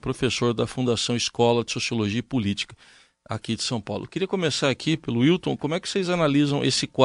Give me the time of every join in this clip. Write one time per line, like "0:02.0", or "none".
none

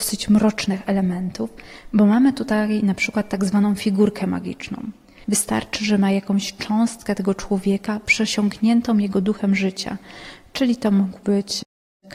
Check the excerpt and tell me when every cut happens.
0:05.2

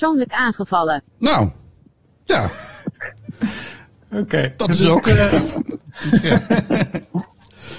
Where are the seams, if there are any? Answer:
0:01.1

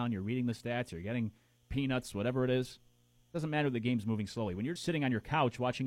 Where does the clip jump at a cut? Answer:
0:04.8

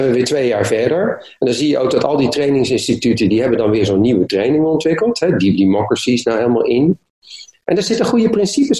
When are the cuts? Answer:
none

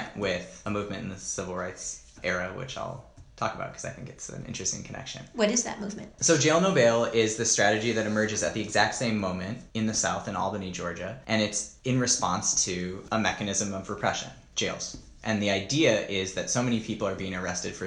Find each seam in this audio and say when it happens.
0:06.1

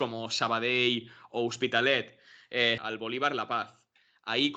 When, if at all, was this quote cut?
0:02.8

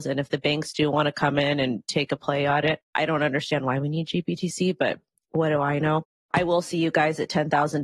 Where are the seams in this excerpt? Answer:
0:02.8

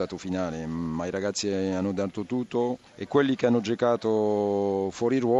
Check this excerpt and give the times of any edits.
0:02.9

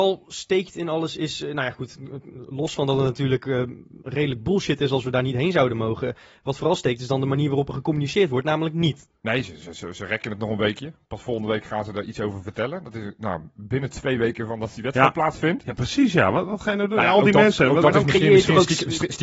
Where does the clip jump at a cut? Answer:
0:09.2

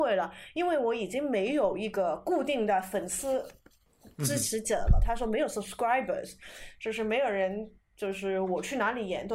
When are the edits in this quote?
none

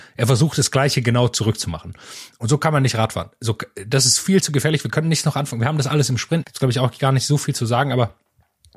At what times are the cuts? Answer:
0:06.4

